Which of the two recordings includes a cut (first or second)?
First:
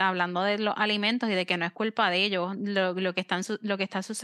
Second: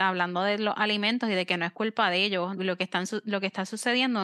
second